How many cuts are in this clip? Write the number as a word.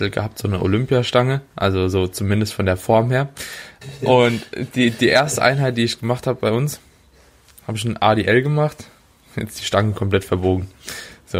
zero